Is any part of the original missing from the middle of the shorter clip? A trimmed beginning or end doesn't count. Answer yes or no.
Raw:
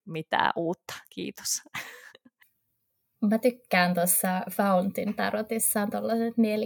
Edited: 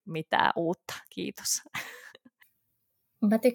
no